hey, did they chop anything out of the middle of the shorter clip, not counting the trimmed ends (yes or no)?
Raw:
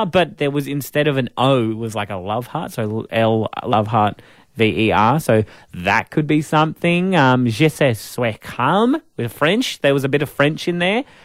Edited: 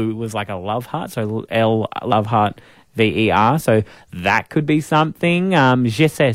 no